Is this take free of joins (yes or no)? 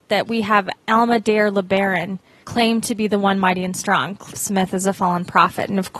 no